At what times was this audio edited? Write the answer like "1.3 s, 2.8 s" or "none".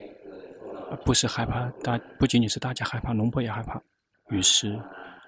4.1 s